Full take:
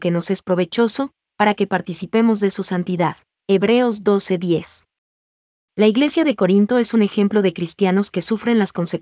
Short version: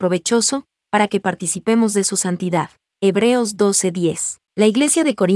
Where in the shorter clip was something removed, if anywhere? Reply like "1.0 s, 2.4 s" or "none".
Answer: 4.5 s

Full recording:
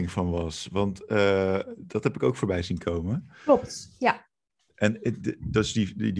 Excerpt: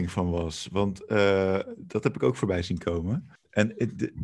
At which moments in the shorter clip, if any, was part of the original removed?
3.4 s

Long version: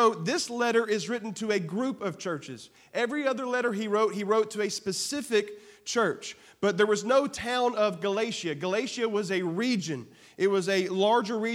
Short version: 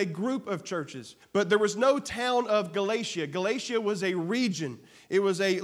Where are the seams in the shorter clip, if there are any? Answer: 1.2 s

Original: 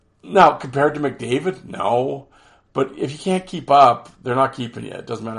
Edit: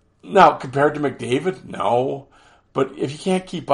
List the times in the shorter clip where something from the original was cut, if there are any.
none

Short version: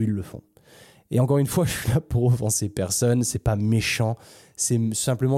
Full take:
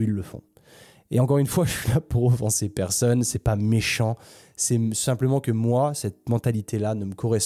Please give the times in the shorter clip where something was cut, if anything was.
none

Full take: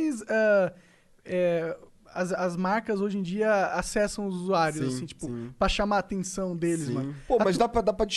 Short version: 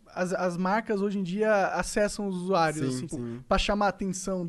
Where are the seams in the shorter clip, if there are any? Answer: 3.1 s

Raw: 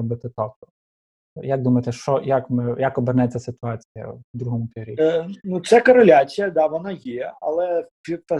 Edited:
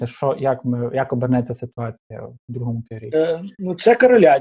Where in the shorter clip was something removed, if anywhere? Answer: none

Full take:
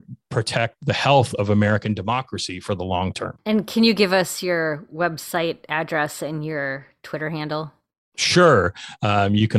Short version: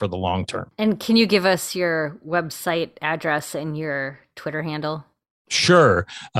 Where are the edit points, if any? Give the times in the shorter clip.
none

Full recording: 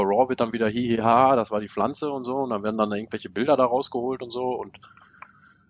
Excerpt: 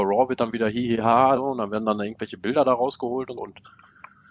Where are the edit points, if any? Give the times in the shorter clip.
1.4 s, 3.4 s

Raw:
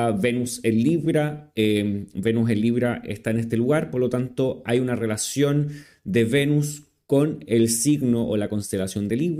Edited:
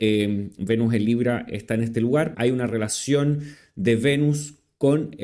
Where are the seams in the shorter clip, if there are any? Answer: 2.3 s

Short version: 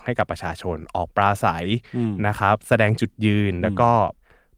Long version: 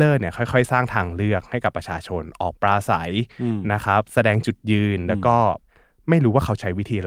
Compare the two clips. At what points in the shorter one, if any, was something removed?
none

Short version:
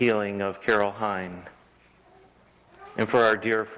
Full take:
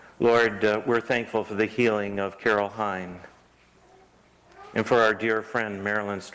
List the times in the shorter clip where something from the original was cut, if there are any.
none

